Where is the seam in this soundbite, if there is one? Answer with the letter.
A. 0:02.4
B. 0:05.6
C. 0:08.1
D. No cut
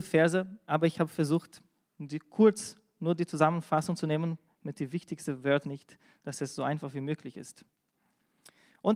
B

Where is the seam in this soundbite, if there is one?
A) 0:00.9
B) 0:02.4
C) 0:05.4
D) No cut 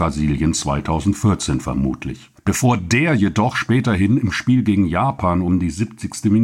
B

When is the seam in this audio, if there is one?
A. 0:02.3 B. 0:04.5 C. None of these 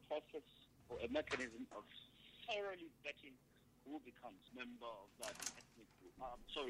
B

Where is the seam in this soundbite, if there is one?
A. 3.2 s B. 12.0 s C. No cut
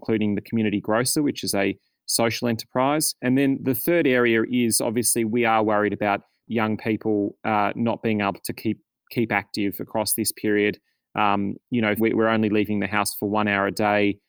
B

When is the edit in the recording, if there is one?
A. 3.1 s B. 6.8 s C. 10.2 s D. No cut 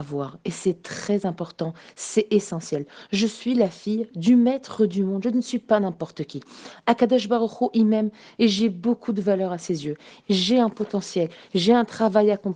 C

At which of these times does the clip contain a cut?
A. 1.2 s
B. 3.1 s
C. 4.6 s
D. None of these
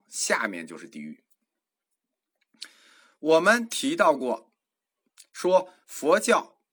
D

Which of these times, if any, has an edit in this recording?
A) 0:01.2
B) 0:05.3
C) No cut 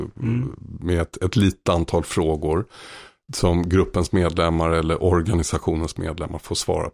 C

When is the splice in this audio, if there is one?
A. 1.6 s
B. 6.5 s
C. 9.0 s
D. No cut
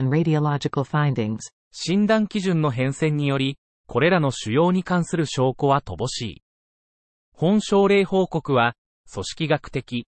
A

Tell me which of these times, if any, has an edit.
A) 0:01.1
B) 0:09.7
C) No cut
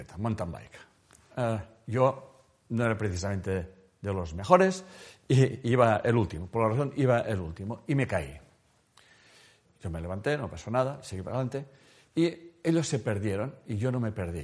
B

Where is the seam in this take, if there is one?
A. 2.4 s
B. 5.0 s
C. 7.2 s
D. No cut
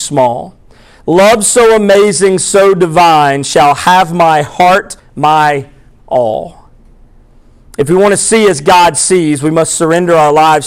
B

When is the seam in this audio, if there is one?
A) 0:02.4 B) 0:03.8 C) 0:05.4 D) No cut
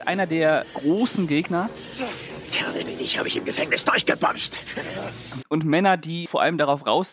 C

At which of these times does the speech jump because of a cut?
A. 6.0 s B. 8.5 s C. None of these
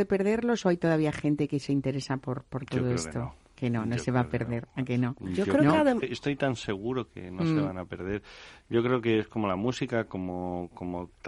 A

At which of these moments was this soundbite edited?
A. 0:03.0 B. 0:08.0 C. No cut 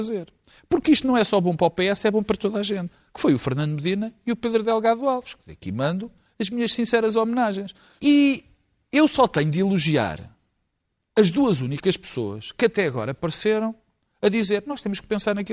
B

